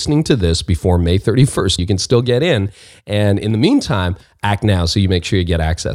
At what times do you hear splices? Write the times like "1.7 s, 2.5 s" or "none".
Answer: 1.8 s